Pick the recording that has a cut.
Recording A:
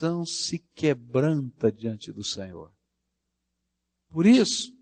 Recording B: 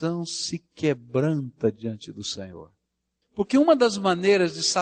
B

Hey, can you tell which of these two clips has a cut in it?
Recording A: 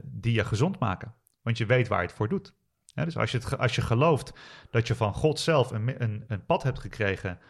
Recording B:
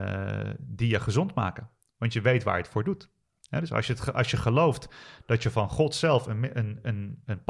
A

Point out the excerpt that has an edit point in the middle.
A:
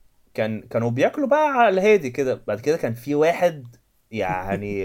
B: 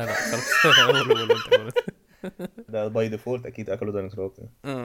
B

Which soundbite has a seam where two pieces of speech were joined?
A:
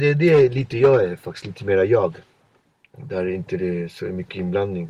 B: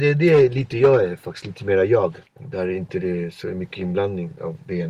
B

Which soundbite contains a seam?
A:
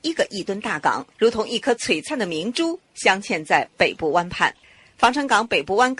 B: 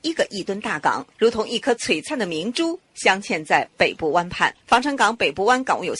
B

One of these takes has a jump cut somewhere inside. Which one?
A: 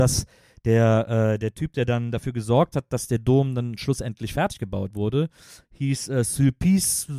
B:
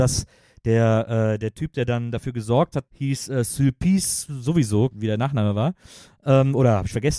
B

